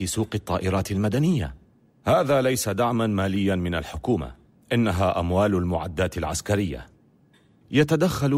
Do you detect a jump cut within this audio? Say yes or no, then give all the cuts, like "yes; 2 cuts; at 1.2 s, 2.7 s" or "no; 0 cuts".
no; 0 cuts